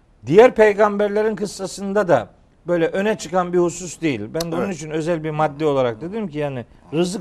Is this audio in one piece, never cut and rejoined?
yes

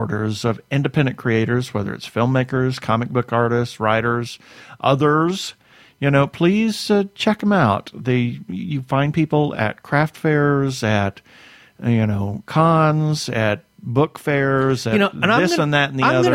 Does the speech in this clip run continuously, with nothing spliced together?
yes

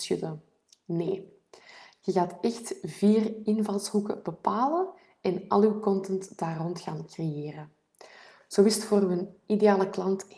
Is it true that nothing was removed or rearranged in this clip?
yes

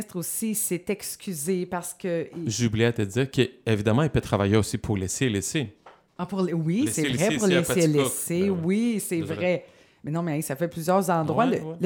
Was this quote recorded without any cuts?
yes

